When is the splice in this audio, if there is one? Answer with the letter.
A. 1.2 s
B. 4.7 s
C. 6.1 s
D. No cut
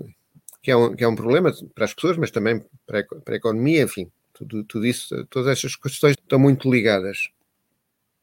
C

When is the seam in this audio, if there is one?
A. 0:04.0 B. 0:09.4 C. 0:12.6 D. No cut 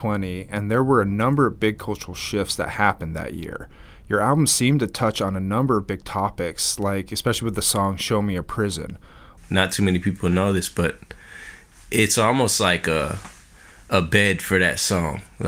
B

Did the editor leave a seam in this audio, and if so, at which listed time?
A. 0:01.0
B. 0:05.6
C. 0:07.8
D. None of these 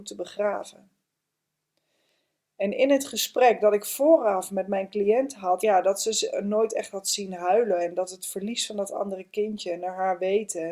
B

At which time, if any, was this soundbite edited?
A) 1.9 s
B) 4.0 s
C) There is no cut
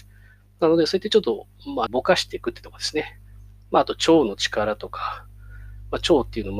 A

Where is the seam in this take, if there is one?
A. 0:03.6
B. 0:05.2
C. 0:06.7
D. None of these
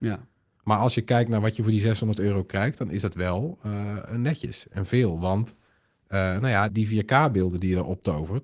C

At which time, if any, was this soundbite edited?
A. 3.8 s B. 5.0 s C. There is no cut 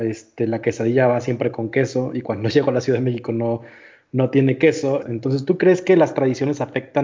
B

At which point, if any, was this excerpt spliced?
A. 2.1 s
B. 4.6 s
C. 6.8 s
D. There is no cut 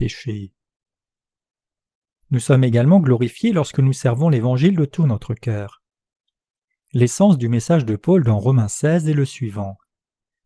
A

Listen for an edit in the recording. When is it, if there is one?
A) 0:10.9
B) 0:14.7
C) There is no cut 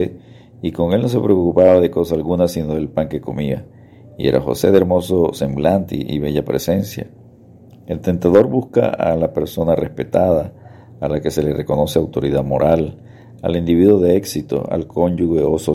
C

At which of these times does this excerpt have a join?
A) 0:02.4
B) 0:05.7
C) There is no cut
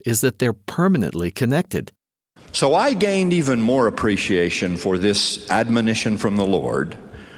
A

